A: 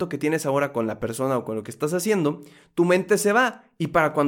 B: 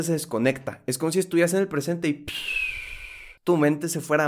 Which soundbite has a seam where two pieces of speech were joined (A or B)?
B